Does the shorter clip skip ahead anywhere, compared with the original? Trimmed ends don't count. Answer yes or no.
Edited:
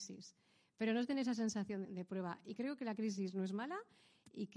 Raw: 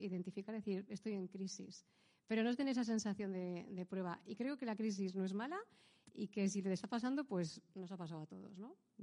yes